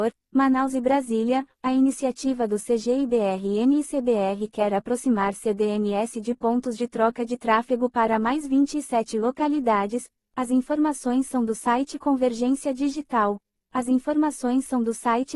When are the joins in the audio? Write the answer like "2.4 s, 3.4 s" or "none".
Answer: 10.2 s, 13.6 s